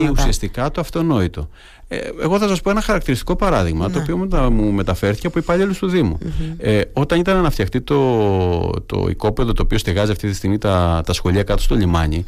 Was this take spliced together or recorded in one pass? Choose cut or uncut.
uncut